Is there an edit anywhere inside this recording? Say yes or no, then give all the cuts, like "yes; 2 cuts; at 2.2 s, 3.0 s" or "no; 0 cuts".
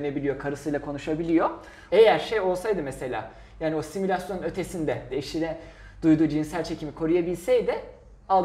yes; 2 cuts; at 1.9 s, 5.1 s